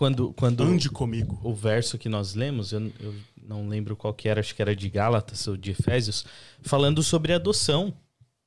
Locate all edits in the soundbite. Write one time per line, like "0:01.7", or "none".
none